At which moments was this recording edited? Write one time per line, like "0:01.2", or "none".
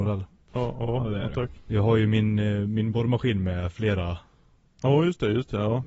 0:01.7